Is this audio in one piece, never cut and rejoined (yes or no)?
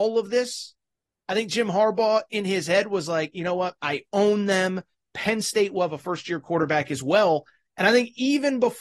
no